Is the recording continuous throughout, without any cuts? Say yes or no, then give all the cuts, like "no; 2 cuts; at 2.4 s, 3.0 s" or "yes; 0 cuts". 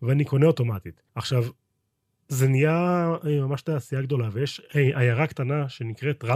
no; 1 cut; at 1.1 s